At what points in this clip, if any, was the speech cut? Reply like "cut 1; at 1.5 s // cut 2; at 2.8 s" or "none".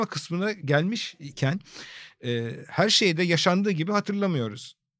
none